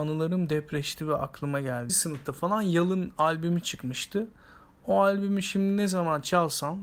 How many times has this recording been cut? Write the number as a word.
one